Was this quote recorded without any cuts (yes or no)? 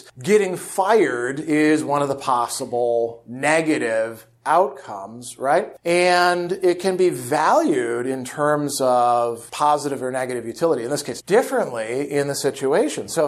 no